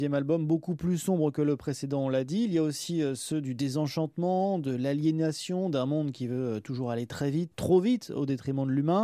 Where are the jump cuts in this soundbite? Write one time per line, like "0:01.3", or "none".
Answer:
none